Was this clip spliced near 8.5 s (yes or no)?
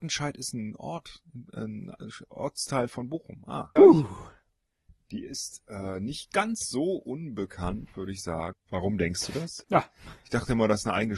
yes